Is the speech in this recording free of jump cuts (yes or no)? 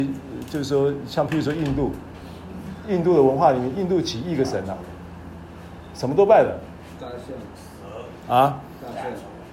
yes